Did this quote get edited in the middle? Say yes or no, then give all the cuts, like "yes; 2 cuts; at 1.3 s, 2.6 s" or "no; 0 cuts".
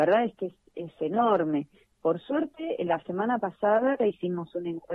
yes; 1 cut; at 4.0 s